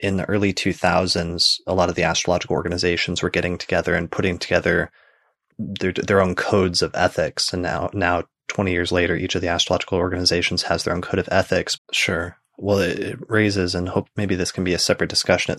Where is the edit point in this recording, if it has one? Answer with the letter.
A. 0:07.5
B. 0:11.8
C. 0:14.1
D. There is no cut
B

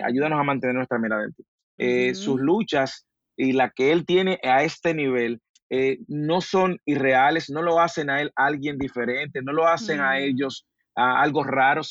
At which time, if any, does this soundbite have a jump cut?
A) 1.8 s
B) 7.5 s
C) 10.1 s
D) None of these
A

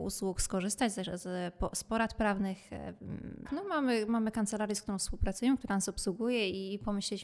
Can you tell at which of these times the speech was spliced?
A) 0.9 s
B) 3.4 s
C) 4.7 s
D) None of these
B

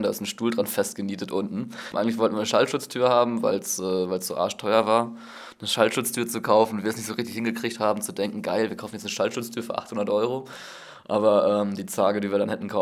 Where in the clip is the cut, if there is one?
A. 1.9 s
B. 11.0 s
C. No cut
A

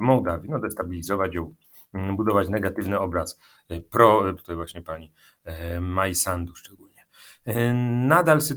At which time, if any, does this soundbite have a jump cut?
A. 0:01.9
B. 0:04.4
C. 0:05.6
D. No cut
B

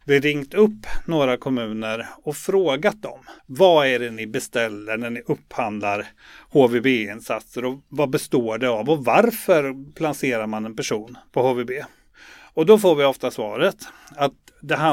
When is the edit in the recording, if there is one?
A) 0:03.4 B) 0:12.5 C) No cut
A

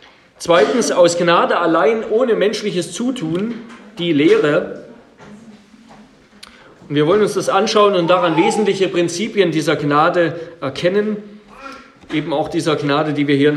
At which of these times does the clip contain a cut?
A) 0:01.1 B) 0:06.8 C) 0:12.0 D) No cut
B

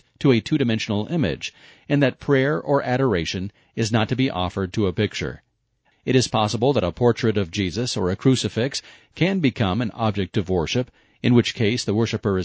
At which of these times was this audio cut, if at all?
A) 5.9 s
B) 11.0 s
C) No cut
A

